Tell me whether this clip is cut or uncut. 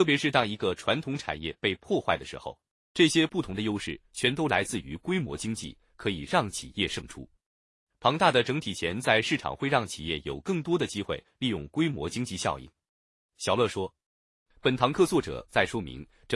cut